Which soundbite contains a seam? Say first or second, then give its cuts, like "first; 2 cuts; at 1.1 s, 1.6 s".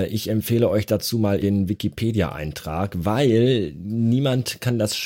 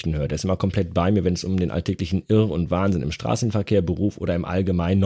first; 1 cut; at 1.4 s